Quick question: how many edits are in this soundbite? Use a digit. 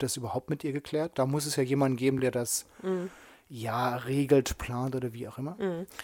0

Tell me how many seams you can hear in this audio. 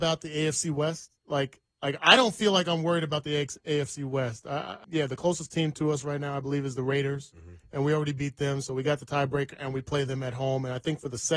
1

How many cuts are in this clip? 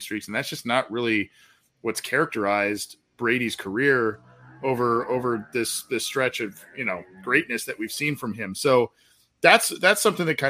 0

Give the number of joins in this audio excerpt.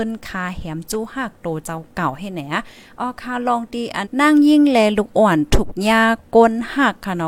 1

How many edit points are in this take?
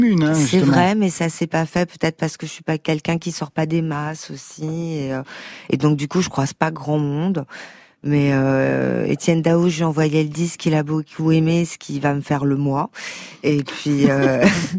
0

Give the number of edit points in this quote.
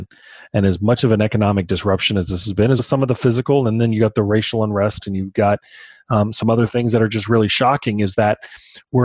1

